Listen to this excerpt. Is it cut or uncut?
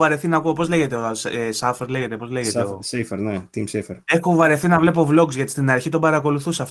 cut